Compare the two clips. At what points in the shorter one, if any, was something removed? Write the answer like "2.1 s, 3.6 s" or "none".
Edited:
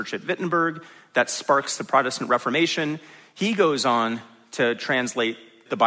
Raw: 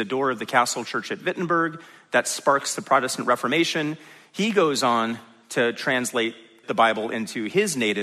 none